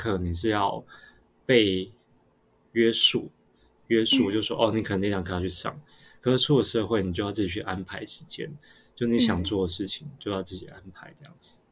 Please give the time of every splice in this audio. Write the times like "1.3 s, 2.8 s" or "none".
none